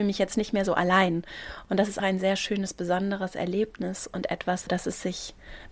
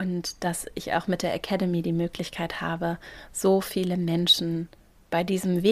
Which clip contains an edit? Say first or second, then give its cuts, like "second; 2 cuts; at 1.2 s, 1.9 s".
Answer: first; 2 cuts; at 2.0 s, 4.7 s